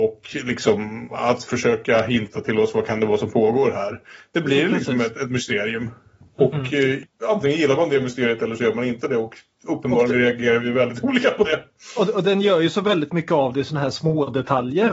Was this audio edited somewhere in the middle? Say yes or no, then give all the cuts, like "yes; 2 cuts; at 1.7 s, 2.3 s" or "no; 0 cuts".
no; 0 cuts